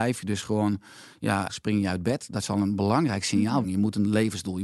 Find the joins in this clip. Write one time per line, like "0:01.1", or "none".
0:01.5
0:03.6